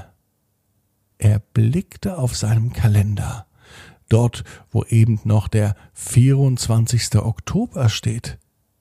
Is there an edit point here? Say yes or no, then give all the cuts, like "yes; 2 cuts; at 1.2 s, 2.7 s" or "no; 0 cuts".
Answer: yes; 1 cut; at 1.1 s